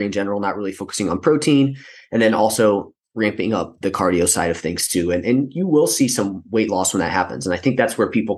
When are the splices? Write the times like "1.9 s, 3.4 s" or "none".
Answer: 3.8 s